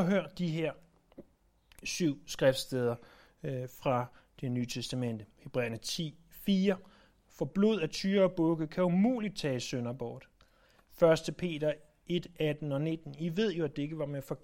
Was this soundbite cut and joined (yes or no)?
no